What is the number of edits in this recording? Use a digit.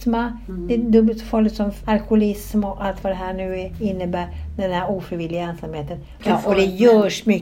2